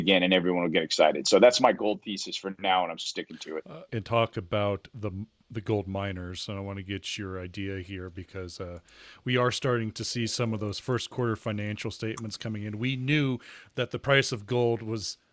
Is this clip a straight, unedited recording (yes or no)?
no